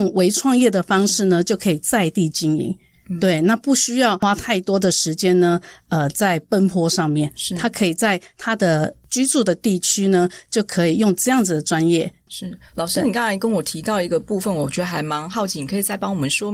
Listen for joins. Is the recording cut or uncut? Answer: cut